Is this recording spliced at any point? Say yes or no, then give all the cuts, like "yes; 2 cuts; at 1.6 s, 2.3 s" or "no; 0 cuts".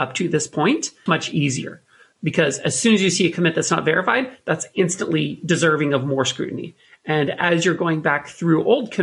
yes; 1 cut; at 1.1 s